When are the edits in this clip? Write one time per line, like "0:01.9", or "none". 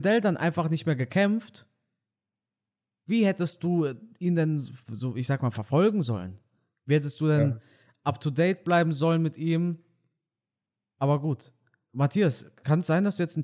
none